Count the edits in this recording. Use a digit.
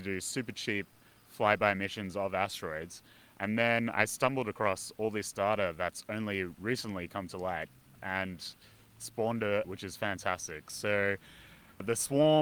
1